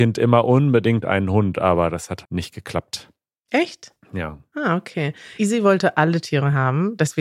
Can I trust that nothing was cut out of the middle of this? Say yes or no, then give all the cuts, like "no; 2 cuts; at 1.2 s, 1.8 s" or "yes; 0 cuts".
no; 2 cuts; at 2.2 s, 5.4 s